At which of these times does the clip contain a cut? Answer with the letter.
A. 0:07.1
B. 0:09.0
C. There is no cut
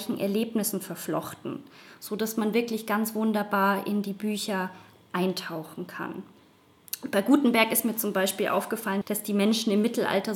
B